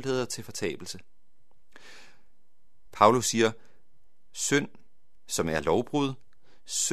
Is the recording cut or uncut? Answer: cut